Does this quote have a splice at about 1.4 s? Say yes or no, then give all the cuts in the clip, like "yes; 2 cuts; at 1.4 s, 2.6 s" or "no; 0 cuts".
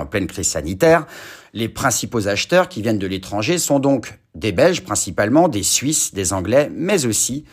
yes; 1 cut; at 1.4 s